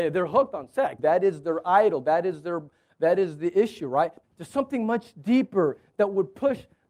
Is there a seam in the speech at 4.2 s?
yes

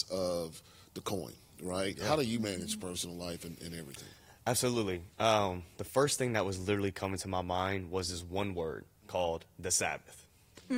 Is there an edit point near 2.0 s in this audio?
no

